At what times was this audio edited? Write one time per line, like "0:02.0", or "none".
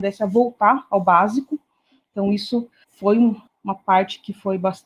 none

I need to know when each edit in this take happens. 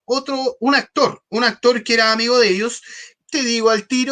0:01.3
0:03.1

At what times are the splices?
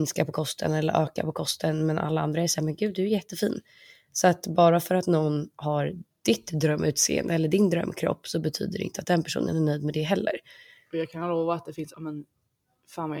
0:11.9

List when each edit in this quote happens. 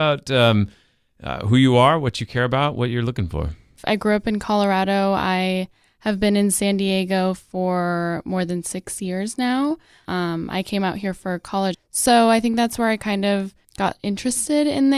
0:10.1
0:11.7
0:13.6

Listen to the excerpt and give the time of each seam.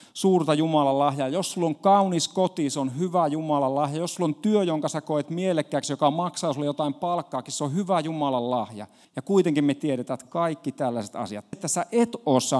0:09.0
0:11.5

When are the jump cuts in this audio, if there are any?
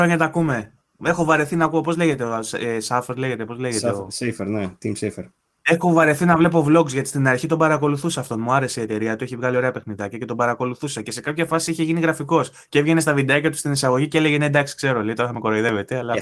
none

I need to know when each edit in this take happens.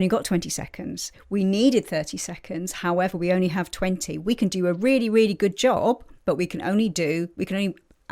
none

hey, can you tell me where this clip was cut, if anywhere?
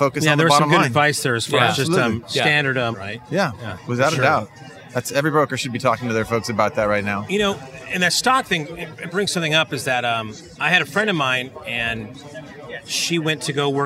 0:02.9

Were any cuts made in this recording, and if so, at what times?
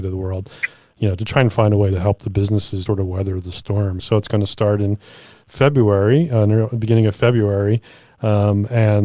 0:02.9
0:04.0

